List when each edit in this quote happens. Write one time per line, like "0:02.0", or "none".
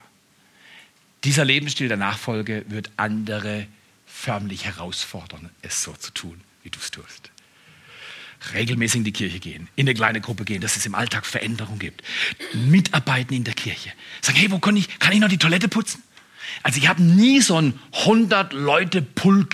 0:10.6